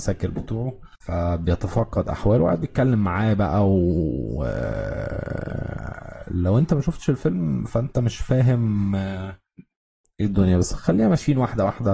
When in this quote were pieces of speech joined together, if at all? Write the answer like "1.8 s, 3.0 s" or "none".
0.9 s